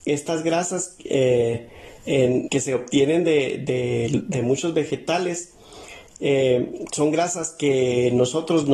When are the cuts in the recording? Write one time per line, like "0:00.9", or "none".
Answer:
0:02.5